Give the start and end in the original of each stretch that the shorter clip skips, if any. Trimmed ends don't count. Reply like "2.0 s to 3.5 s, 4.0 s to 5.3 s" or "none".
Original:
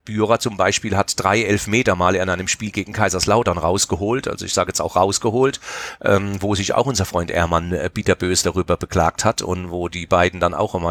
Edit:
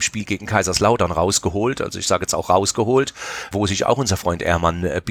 6.0 s to 6.4 s